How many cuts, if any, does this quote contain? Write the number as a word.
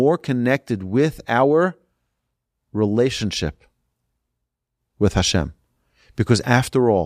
zero